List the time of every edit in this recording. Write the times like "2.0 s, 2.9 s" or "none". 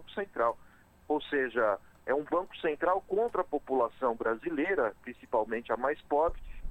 1.0 s